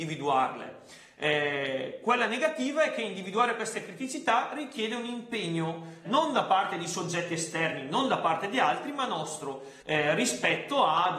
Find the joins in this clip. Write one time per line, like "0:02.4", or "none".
0:06.0
0:09.8